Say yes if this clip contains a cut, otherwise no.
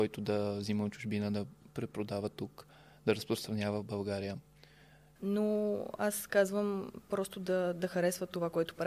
yes